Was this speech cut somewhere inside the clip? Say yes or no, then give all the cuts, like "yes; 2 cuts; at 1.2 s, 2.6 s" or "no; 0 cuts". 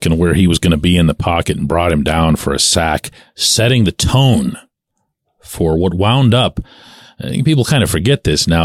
no; 0 cuts